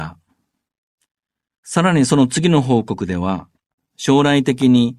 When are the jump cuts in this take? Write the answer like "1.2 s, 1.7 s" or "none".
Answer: 3.8 s